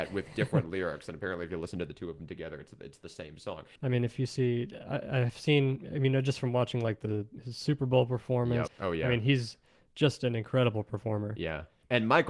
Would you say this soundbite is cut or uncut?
cut